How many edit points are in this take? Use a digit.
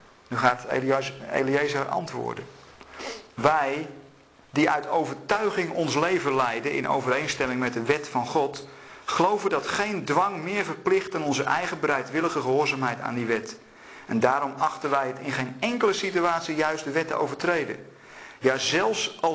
0